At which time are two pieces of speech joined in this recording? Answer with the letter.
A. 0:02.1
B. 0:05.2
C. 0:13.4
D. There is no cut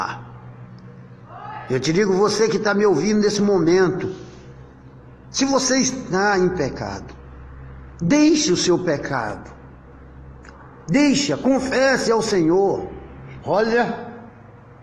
C